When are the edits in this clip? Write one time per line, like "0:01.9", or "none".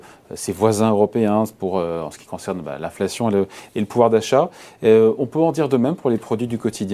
none

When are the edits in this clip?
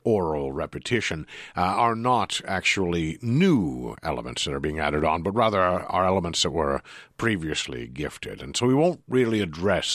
none

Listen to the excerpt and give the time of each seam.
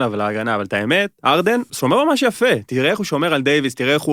0:01.7

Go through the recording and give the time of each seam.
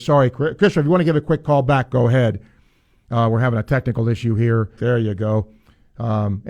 0:04.8

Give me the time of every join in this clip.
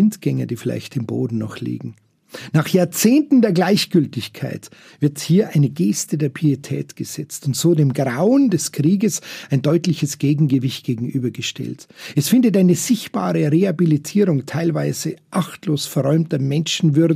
none

